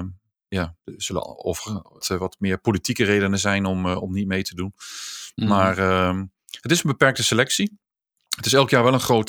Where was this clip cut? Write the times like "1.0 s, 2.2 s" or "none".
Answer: 2.0 s